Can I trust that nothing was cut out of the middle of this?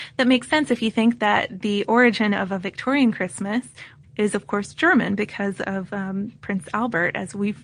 no; 1 cut; at 4.0 s

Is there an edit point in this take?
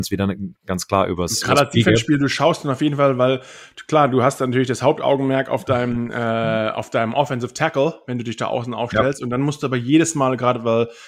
no; 0 cuts

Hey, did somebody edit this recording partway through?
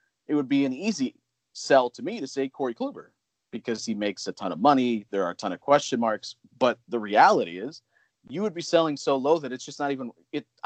no; 0 cuts

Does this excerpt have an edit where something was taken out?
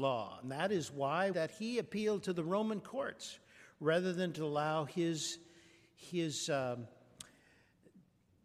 yes; 1 cut; at 1.3 s

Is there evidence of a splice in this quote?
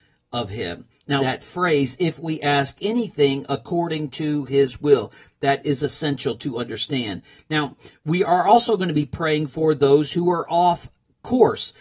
yes; 1 cut; at 1.2 s

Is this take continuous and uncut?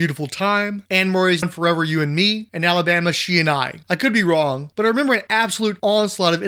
no; 2 cuts; at 1.4 s, 3.8 s

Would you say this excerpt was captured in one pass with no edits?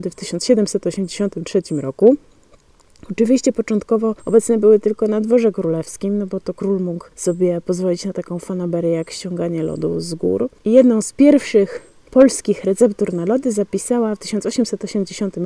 no; 1 cut; at 10.6 s

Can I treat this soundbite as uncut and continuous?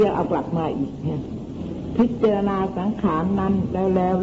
yes; 0 cuts

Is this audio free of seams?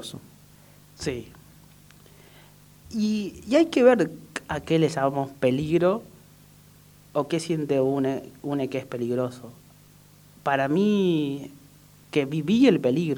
yes; 0 cuts

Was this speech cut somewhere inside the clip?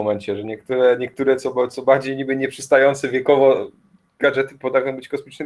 no; 0 cuts

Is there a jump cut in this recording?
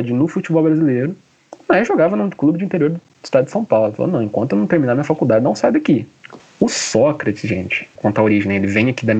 yes; 2 cuts; at 6.4 s, 8.0 s

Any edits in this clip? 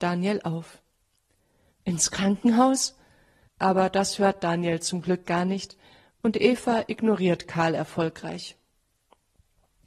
yes; 2 cuts; at 1.7 s, 3.5 s

